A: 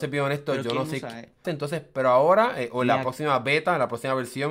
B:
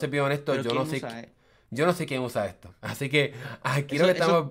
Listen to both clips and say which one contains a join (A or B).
A